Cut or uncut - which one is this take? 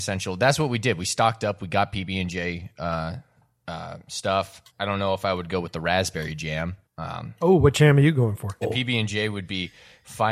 cut